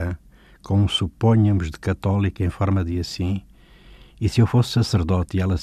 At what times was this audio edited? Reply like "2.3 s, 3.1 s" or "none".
none